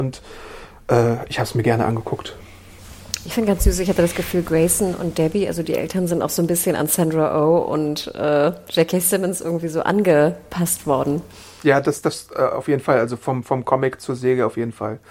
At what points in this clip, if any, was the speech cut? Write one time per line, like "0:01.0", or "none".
none